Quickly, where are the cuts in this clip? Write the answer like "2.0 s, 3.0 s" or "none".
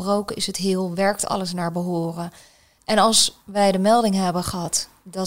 2.8 s